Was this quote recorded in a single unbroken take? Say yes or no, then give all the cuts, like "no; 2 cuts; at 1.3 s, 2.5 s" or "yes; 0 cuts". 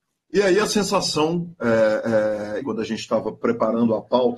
no; 1 cut; at 2.6 s